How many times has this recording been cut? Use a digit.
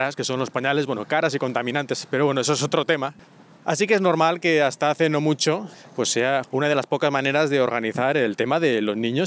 1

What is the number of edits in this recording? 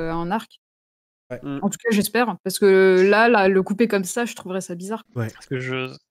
1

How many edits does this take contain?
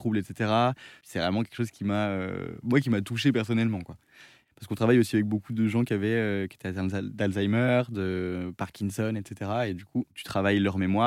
0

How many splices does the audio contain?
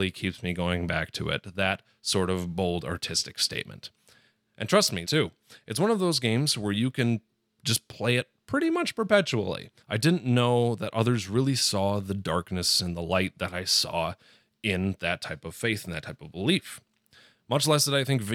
2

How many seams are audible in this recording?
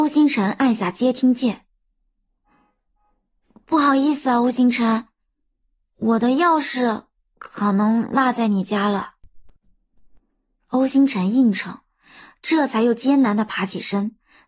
1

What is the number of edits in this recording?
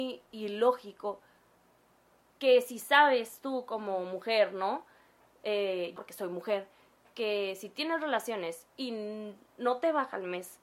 2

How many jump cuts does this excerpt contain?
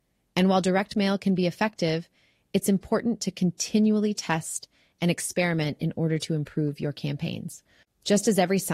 1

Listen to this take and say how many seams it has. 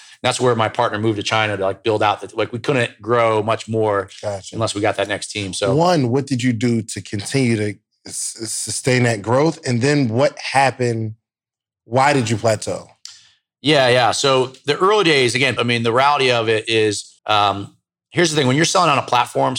2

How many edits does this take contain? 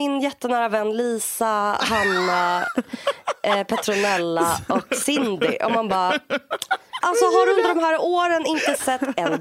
1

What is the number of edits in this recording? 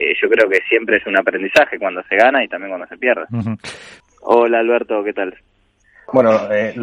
1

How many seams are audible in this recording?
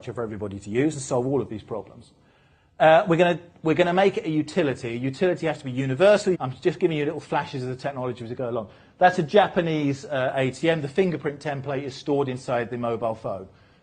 1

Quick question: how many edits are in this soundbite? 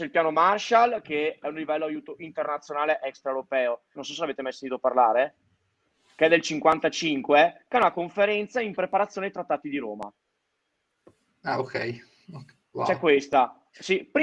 1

